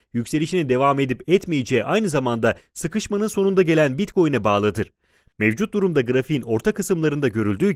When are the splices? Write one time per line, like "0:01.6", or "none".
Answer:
0:05.3